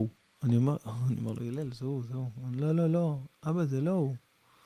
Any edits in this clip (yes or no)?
no